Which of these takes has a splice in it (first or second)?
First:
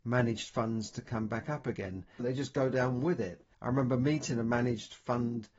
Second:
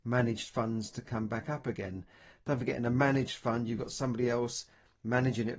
first